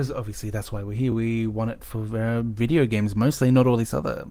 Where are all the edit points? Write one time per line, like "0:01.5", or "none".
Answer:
none